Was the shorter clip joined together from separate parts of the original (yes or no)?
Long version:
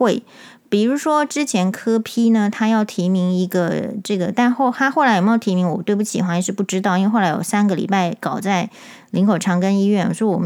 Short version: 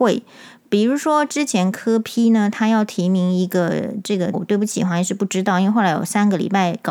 yes